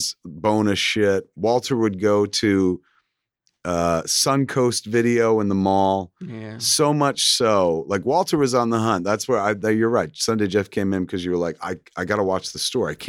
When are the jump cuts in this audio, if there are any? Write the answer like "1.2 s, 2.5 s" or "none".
none